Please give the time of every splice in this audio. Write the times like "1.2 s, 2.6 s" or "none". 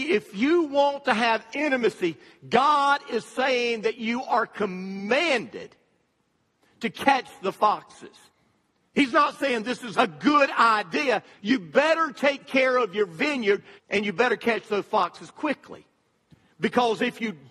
9.9 s, 11.3 s, 13.8 s